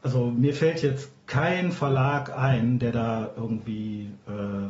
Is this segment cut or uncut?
uncut